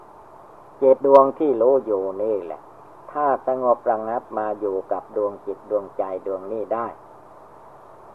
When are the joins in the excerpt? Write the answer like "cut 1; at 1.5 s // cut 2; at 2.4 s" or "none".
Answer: cut 1; at 1.0 s